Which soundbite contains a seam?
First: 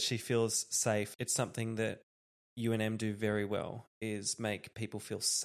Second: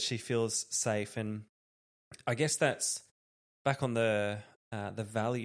first; 1 cut; at 1.1 s

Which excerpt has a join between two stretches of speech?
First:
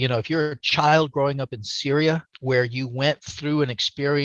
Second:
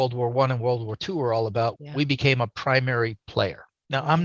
second; 1 cut; at 1.8 s

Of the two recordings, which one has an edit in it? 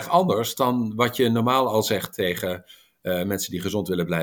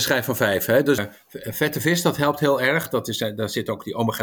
second; 1 cut; at 1.0 s

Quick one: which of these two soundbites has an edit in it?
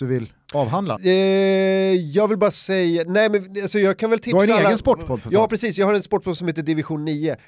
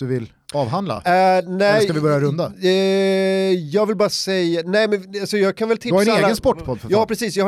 first; 1 cut; at 1.0 s

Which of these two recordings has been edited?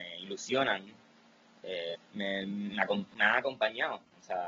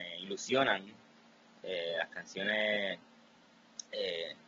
first; 1 cut; at 1.9 s

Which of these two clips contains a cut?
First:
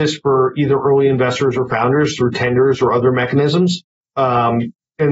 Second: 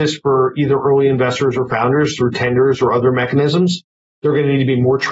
first; 1 cut; at 4.0 s

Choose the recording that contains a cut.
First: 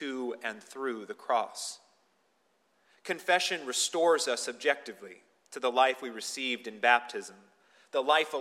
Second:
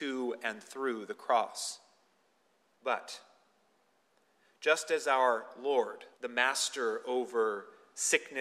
second; 2 cuts; at 2.7 s, 6.1 s

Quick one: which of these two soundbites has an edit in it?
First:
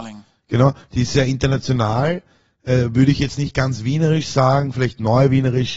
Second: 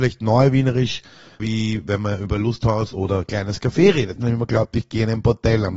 second; 2 cuts; at 1.4 s, 4.2 s

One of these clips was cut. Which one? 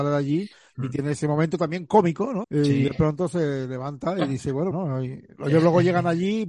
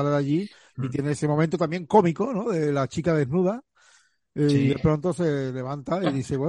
first; 2 cuts; at 2.4 s, 4.7 s

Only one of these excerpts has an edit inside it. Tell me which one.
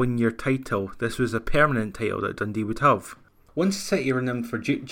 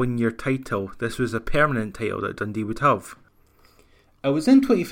first; 1 cut; at 3.5 s

